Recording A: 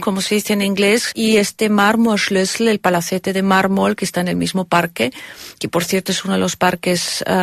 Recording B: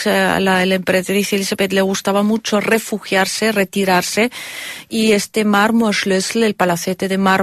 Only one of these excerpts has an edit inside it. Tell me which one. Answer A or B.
A